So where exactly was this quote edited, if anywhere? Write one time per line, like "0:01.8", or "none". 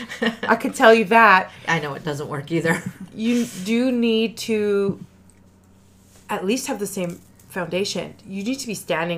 none